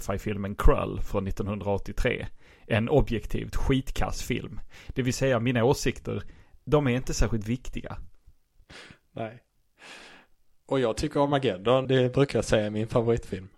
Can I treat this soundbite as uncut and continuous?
no; 1 cut; at 11.8 s

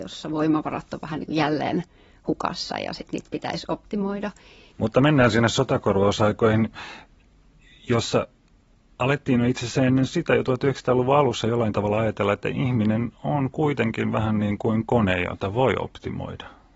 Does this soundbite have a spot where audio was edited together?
yes; 1 cut; at 4.7 s

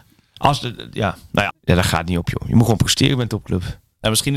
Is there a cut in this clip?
yes; 1 cut; at 1.5 s

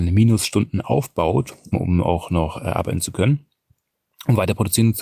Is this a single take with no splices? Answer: no; 1 cut; at 1.7 s

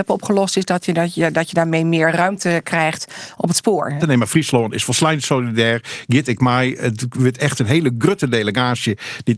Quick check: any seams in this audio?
yes; 1 cut; at 4.0 s

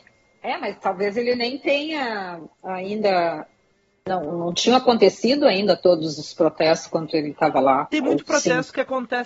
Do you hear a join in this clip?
yes; 1 cut; at 4.3 s

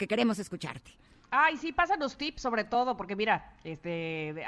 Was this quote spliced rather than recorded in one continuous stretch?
no; 0 cuts

